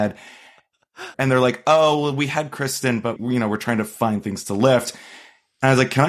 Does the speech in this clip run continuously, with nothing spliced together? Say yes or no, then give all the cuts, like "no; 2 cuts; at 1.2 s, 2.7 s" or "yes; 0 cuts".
no; 2 cuts; at 1.1 s, 3.2 s